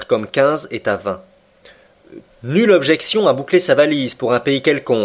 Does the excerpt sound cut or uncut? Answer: cut